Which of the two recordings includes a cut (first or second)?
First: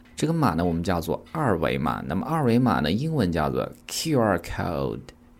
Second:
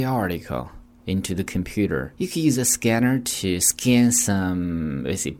second